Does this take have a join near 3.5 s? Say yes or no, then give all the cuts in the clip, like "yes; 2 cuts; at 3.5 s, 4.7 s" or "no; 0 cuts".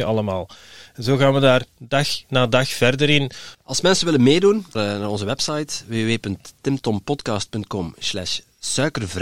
yes; 2 cuts; at 3.5 s, 4.7 s